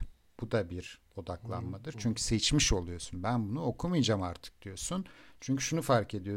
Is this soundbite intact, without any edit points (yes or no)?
yes